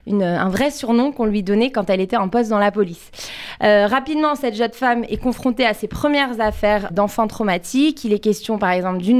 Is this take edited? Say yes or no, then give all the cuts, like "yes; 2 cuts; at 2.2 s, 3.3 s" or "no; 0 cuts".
yes; 1 cut; at 6.9 s